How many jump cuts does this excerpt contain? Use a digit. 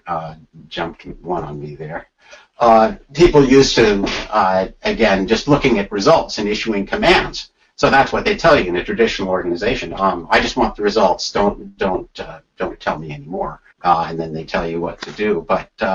1